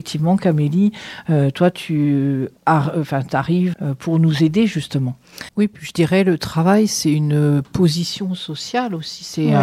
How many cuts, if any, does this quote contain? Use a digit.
3